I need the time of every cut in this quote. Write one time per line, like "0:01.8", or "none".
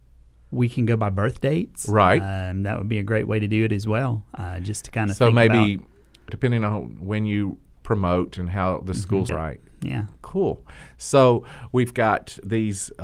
0:06.3
0:09.3